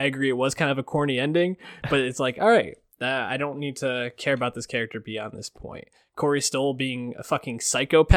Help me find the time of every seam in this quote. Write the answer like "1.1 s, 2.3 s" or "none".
none